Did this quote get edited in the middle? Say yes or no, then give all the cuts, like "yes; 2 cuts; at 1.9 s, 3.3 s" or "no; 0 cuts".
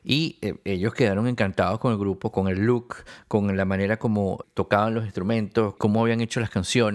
yes; 2 cuts; at 4.4 s, 5.8 s